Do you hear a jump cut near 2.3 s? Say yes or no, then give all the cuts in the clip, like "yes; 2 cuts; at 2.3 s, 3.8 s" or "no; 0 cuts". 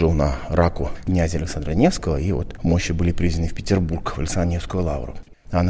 no; 0 cuts